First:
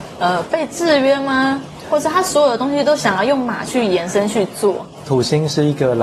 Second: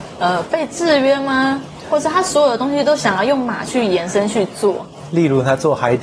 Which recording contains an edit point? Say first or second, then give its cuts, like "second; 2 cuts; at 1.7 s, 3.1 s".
first; 1 cut; at 5.0 s